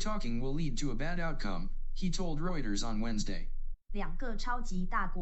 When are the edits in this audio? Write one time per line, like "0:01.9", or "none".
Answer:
0:03.8